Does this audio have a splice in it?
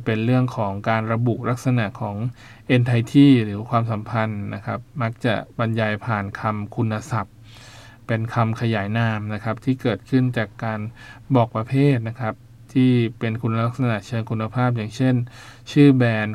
no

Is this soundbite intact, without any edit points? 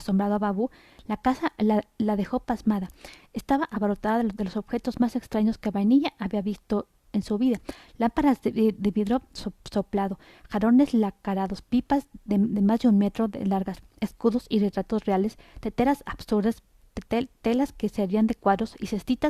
no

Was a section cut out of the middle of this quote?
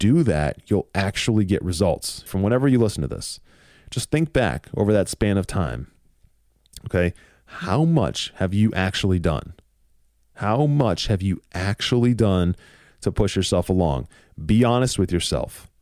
yes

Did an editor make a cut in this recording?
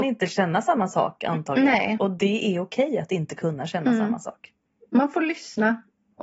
no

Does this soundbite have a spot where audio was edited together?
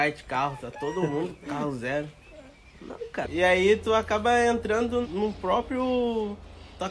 yes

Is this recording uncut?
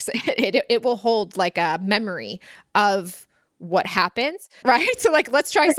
no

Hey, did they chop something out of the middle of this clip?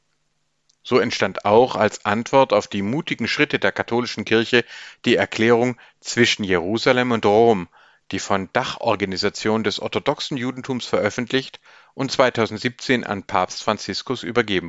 no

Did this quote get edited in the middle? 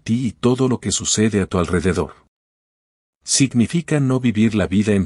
no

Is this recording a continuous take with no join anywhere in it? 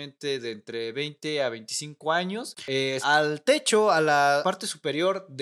no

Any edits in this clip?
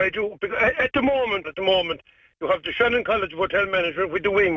yes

